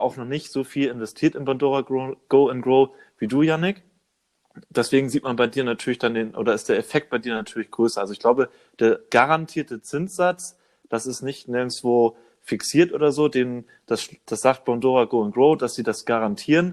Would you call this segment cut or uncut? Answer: uncut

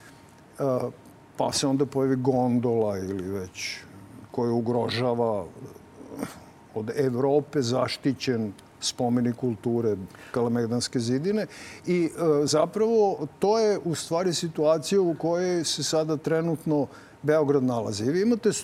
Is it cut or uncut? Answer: uncut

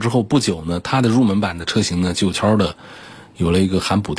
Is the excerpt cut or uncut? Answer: cut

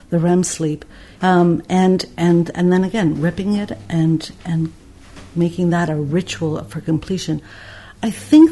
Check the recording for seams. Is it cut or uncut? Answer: cut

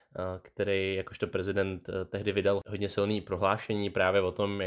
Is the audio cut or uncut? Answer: uncut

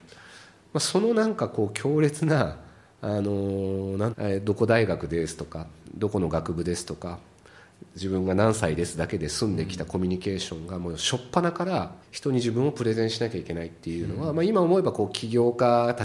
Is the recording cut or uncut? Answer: cut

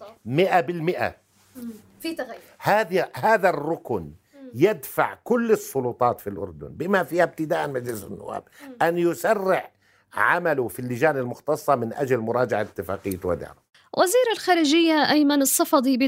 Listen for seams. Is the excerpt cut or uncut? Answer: uncut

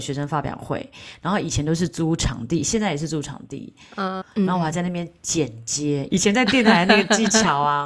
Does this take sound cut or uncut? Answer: cut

